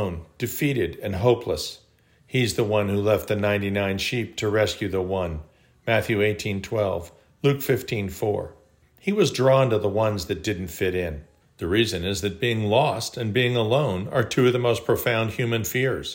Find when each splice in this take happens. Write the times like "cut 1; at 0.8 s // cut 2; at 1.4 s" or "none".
cut 1; at 8.8 s // cut 2; at 11.4 s